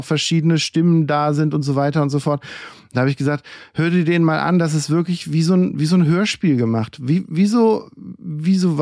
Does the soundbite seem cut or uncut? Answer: uncut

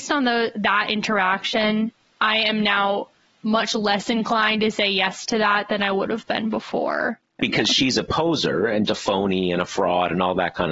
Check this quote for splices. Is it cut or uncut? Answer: cut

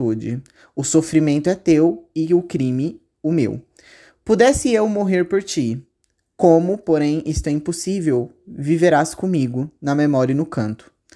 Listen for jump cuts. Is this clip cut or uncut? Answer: uncut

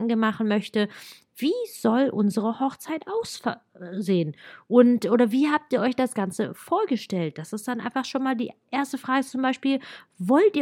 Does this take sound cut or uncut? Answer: uncut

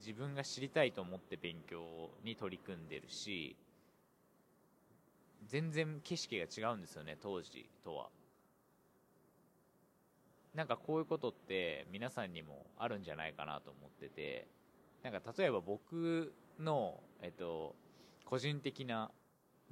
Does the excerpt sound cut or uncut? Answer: uncut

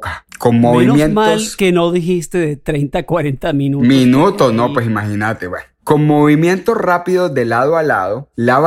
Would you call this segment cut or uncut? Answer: uncut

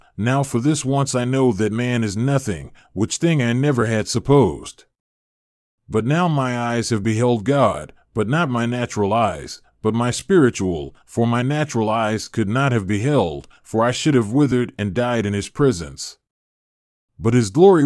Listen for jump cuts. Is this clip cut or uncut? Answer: uncut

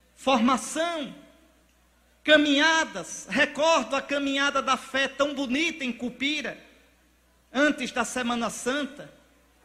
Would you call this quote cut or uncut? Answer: uncut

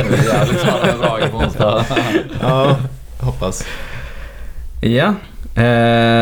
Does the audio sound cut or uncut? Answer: uncut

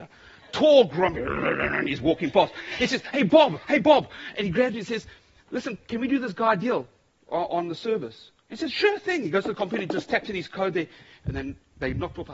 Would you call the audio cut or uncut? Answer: uncut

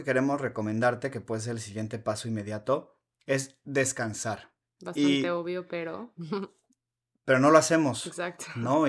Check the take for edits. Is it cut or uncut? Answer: uncut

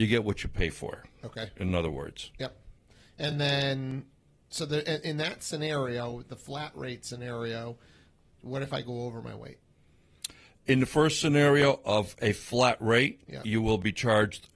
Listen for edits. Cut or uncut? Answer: uncut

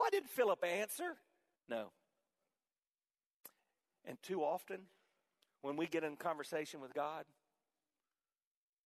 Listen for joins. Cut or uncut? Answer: cut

